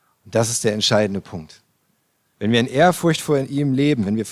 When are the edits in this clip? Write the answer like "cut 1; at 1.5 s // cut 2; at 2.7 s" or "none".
cut 1; at 2.3 s